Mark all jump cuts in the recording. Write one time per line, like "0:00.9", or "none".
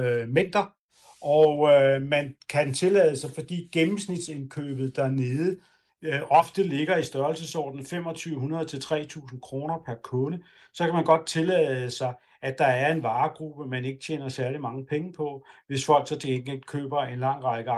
none